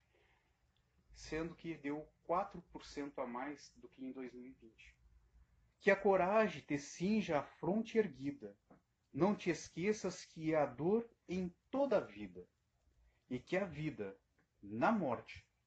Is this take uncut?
no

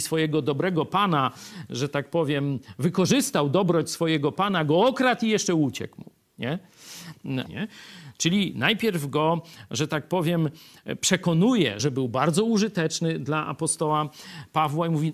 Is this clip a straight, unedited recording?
no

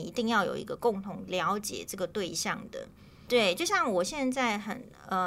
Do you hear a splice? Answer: yes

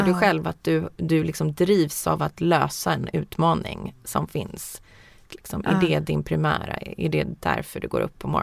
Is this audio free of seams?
no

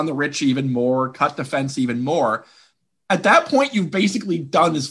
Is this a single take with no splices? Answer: yes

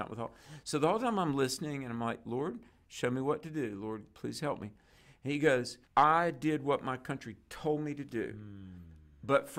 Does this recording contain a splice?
yes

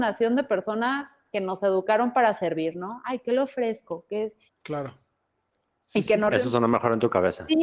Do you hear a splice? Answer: yes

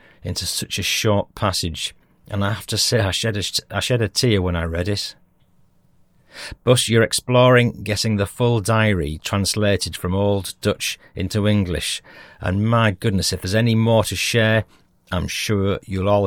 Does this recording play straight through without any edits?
yes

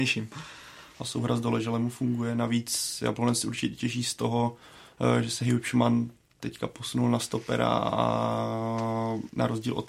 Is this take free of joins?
no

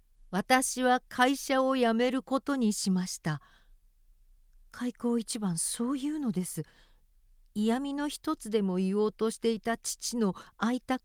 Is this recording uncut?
yes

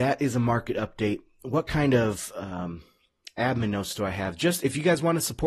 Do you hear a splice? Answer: no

